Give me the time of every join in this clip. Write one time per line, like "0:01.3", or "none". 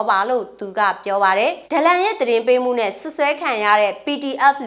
0:01.7

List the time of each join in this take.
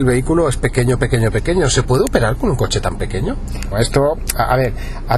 0:03.7

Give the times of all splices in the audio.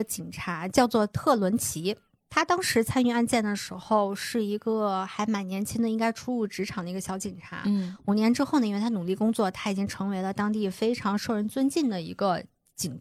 none

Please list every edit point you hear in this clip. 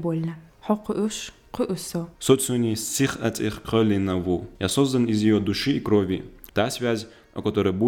0:02.1
0:06.5

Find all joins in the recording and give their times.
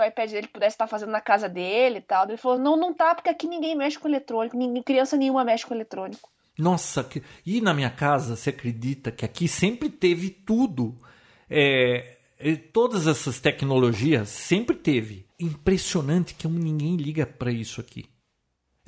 0:02.6
0:15.3

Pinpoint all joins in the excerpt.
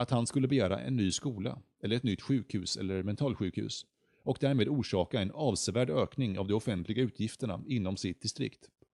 none

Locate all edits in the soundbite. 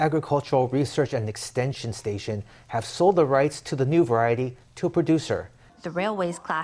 0:05.7

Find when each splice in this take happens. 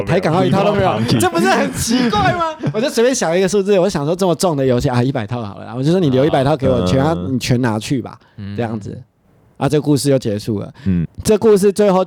0:11.0

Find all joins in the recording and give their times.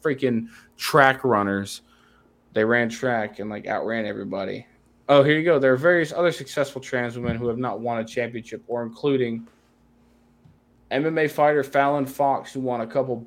none

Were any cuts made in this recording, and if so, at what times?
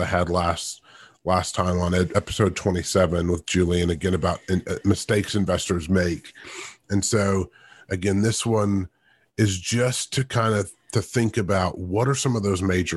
none

